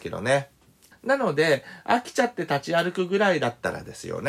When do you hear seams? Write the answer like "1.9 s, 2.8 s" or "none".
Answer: 0.9 s